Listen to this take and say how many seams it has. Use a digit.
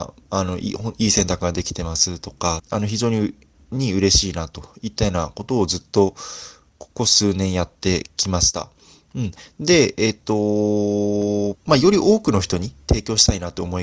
2